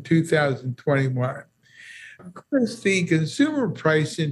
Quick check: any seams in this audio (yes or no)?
yes